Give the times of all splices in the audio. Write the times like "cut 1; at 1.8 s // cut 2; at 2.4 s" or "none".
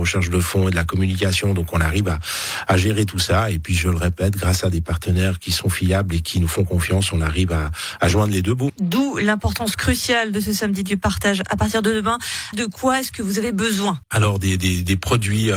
cut 1; at 8.7 s // cut 2; at 12.5 s // cut 3; at 14.0 s